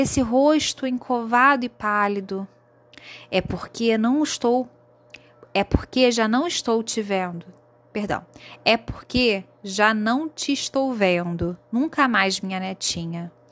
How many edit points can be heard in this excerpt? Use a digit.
0